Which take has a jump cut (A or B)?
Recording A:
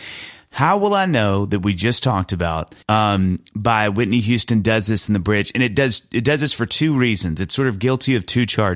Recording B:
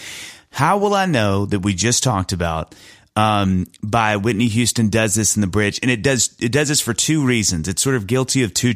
A